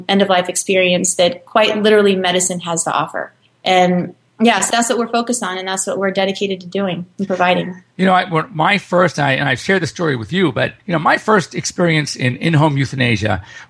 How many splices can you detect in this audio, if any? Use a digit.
0